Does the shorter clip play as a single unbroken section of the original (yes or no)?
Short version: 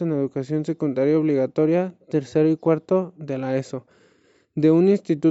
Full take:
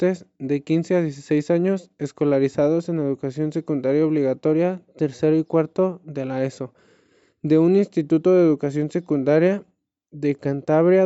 yes